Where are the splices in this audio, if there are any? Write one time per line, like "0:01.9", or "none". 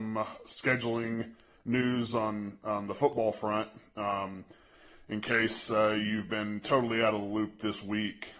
none